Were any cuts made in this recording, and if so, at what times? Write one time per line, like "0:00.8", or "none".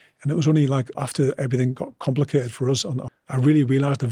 0:00.9
0:03.1